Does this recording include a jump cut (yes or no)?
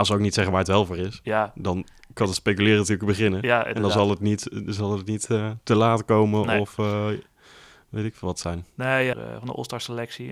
yes